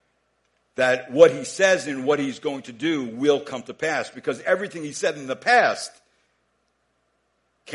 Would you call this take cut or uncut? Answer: uncut